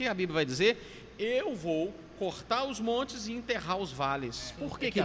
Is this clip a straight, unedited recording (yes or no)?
yes